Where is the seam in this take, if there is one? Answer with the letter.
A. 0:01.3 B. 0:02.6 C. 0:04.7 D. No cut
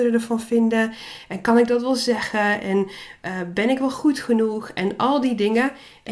D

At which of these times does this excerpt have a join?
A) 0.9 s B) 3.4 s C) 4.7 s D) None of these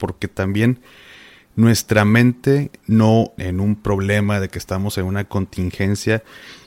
B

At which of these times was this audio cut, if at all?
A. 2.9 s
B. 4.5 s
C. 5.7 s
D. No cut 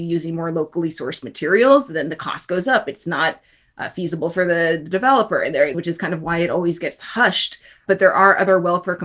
C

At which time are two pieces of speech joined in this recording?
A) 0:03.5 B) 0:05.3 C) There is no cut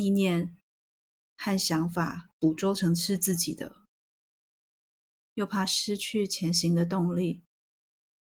B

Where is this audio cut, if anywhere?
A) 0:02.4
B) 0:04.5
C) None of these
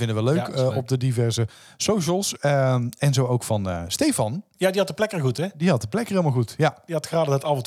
B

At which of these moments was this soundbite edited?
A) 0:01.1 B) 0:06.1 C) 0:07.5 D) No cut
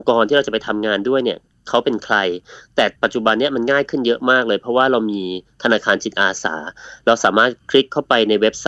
D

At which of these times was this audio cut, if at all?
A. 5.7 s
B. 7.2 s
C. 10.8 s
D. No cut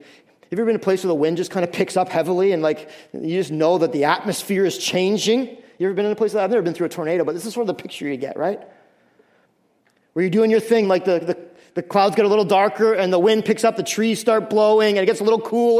C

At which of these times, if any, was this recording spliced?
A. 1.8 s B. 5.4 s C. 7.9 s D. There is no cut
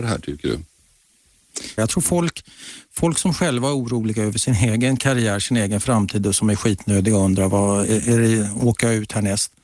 A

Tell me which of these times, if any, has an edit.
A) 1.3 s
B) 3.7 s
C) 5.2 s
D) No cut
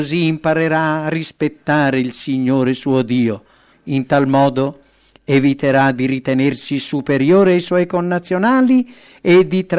B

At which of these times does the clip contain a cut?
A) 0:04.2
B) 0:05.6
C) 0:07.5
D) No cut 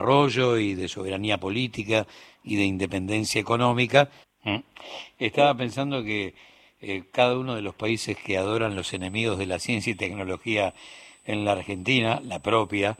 A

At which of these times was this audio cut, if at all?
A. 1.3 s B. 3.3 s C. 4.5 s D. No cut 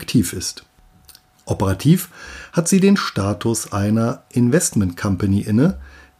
A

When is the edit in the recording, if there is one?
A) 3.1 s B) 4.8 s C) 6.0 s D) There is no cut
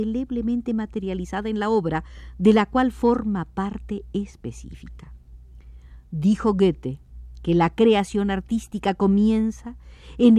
D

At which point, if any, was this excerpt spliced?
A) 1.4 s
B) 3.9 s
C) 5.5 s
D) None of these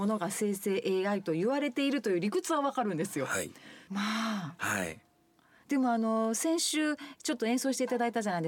B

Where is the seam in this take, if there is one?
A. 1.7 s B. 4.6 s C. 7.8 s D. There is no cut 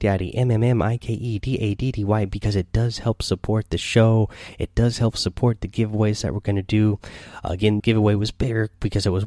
C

